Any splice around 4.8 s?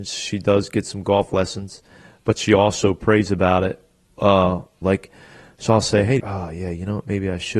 yes; 2 cuts; at 4.8 s, 6.2 s

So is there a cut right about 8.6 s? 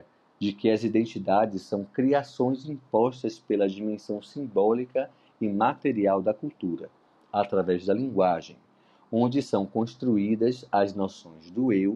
no; 0 cuts

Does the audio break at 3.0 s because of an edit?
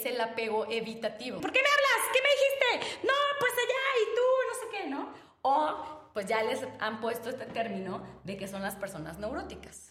no; 1 cut; at 1.4 s

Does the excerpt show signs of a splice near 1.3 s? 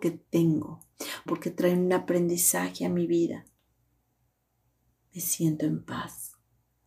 yes; 1 cut; at 1.3 s

